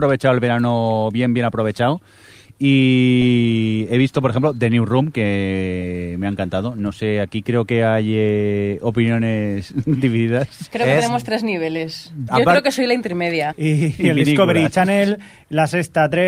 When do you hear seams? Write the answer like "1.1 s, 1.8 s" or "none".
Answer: 12.3 s, 13.5 s